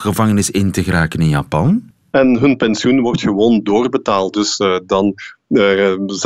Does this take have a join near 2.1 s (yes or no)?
yes